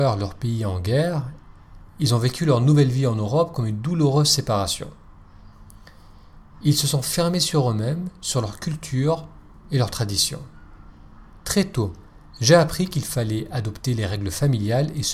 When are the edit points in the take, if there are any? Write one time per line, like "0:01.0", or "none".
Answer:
none